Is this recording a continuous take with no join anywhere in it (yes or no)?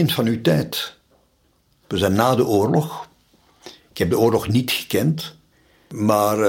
no